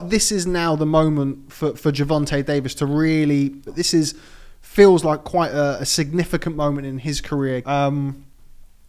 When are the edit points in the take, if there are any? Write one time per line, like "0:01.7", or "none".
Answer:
0:03.7
0:07.6